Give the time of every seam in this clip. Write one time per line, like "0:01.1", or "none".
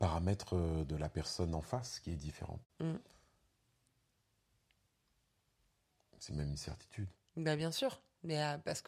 0:02.7